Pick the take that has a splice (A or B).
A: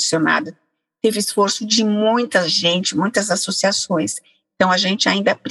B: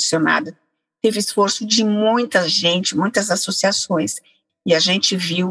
B